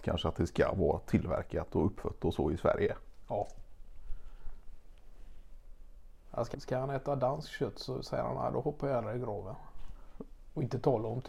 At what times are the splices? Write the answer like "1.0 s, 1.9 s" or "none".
6.5 s